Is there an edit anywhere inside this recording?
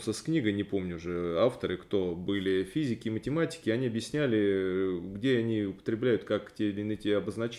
no; 0 cuts

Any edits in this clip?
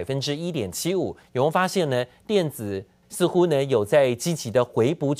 yes; 2 cuts; at 1.2 s, 3.0 s

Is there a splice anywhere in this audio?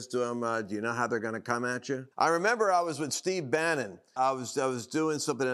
yes; 2 cuts; at 2.1 s, 4.2 s

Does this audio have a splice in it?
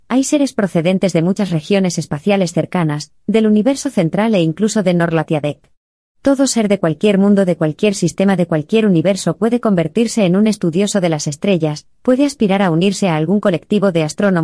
no; 0 cuts

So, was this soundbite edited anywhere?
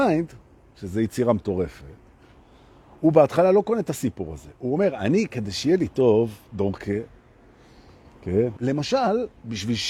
yes; 1 cut; at 8.6 s

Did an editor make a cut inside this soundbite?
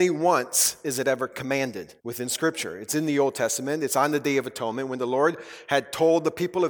yes; 1 cut; at 2.0 s

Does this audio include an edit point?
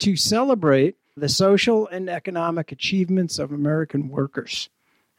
yes; 1 cut; at 1.2 s

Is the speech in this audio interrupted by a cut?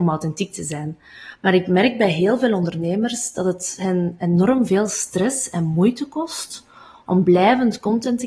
no; 0 cuts

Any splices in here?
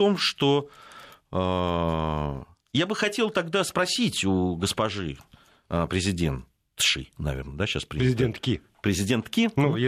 no; 0 cuts

